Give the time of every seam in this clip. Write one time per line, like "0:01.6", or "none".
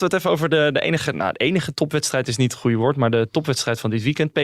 none